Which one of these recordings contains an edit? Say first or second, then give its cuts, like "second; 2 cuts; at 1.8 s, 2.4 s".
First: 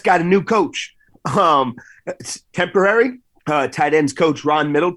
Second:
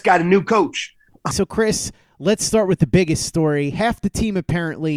second; 1 cut; at 1.3 s